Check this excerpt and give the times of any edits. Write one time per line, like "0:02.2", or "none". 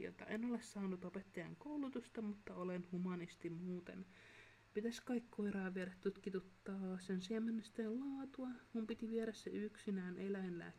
none